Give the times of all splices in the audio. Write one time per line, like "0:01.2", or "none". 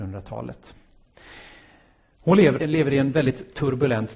0:02.6